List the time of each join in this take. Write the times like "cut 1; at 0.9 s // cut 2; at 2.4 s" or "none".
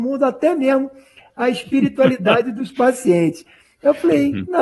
none